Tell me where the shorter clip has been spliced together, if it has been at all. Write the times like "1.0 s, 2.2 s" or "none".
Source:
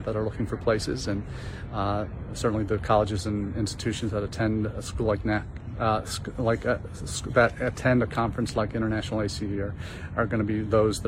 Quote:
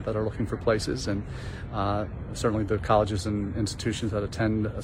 none